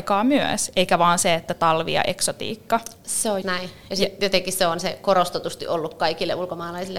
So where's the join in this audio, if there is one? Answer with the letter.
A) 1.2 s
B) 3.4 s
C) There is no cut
B